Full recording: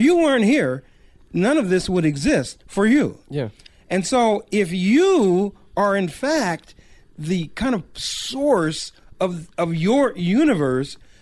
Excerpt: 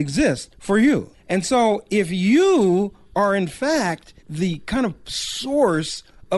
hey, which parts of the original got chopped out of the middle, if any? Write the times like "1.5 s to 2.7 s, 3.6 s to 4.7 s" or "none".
3.2 s to 3.7 s, 6.8 s to 7.1 s